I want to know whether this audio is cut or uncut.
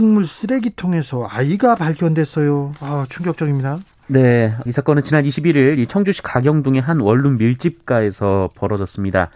cut